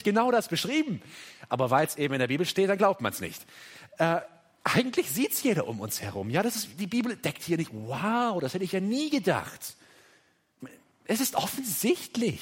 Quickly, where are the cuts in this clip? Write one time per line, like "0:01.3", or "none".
none